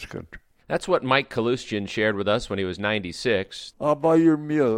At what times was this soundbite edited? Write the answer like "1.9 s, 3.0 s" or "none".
3.7 s